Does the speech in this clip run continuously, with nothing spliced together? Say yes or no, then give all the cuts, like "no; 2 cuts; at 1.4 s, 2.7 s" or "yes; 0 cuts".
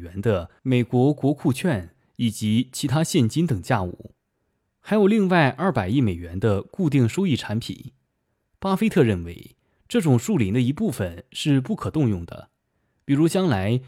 yes; 0 cuts